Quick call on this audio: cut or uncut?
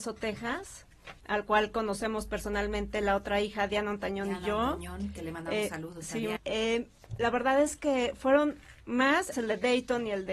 cut